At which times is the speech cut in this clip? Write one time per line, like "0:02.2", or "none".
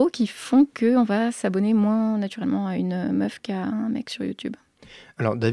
none